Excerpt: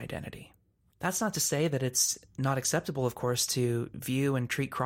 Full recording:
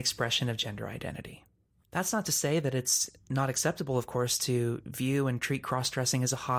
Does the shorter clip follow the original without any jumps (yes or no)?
yes